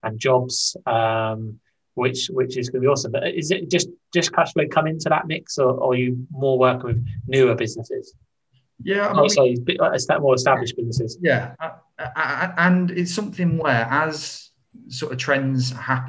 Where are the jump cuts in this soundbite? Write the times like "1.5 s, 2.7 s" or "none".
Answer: none